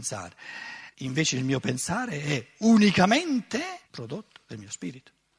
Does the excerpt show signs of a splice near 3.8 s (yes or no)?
yes